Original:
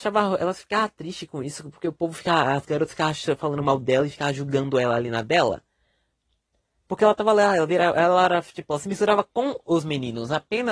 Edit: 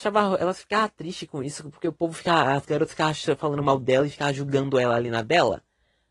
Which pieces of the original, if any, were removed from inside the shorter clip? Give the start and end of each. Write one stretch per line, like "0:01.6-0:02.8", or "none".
none